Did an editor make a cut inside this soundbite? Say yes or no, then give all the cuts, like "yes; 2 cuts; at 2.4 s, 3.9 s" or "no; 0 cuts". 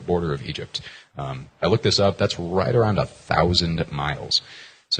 no; 0 cuts